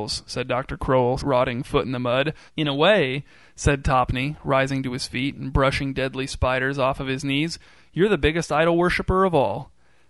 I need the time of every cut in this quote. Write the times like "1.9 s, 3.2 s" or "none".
1.2 s, 2.5 s